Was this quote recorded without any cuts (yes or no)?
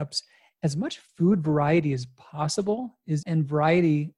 no